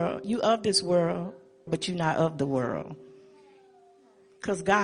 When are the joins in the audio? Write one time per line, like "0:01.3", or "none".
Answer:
0:01.7